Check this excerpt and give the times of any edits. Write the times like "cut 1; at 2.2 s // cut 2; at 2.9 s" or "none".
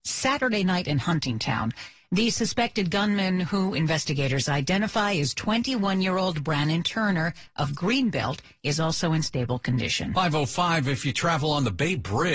none